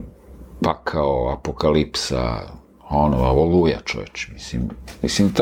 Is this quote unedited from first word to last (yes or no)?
yes